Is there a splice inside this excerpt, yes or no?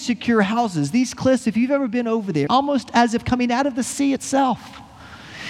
yes